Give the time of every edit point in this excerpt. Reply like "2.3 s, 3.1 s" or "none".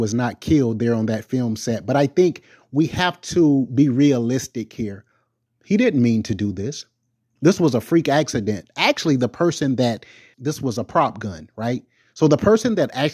10.3 s